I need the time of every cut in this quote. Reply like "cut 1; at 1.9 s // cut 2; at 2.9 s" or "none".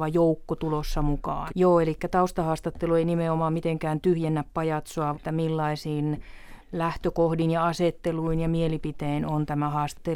cut 1; at 1.5 s // cut 2; at 5.1 s